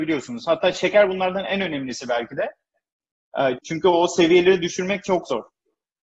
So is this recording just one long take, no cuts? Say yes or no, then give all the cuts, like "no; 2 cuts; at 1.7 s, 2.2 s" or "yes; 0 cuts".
no; 1 cut; at 3.6 s